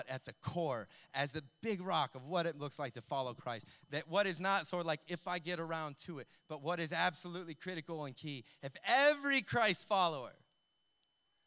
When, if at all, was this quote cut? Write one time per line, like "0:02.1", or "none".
none